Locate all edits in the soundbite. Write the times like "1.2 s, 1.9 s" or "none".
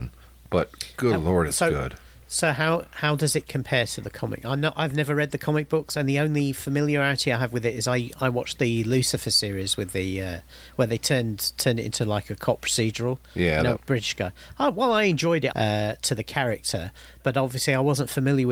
13.8 s, 15.5 s

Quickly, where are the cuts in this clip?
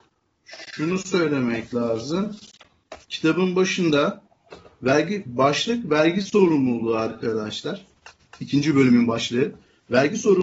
3.0 s

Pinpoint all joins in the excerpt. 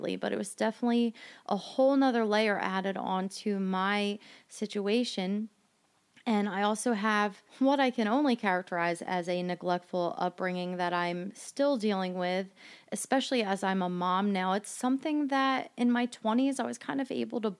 7.5 s

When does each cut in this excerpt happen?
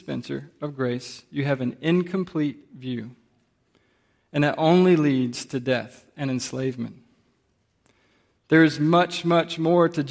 none

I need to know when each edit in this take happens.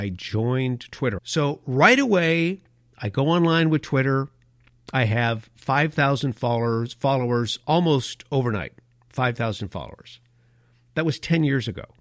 1.2 s

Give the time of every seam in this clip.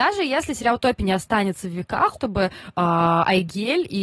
2.1 s

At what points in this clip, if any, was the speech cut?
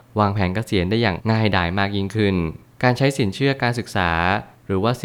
1.2 s

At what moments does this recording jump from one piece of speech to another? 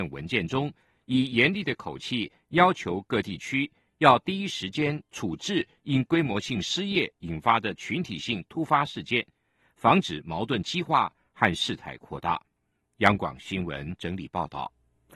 none

